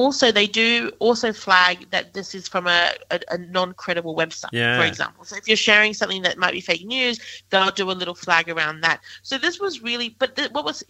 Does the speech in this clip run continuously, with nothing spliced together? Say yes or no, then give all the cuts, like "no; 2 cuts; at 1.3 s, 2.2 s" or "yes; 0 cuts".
yes; 0 cuts